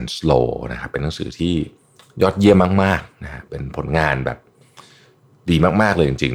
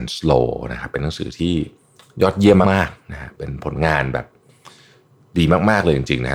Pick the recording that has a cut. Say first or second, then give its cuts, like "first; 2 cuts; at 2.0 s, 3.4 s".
second; 1 cut; at 2.6 s